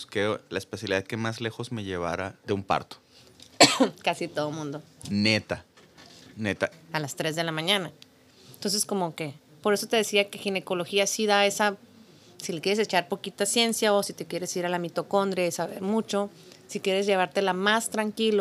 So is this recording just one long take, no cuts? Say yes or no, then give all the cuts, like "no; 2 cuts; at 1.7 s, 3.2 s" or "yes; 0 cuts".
no; 1 cut; at 6.7 s